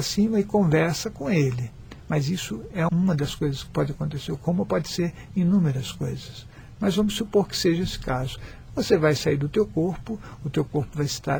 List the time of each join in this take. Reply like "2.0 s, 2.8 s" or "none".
2.9 s, 6.8 s